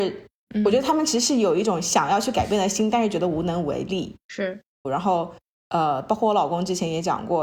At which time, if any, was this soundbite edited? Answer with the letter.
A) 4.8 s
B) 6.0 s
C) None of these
A